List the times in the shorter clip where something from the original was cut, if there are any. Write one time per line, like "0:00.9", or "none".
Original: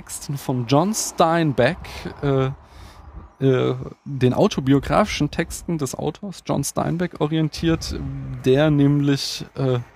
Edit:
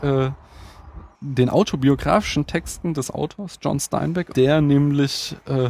0:01.1
0:04.3